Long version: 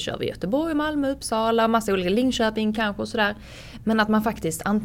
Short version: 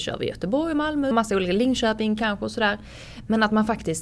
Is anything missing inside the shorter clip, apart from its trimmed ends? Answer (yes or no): yes